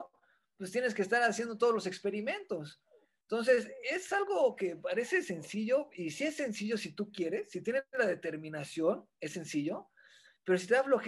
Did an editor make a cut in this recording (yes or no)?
no